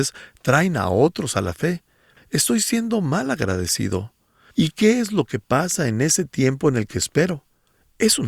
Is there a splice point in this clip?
yes; 2 cuts; at 2.2 s, 4.5 s

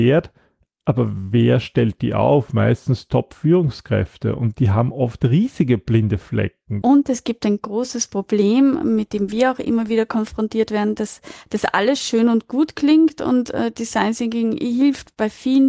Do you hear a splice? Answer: yes; 1 cut; at 6.8 s

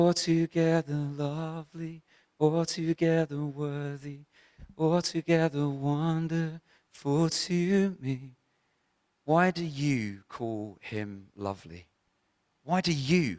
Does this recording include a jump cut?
no; 0 cuts

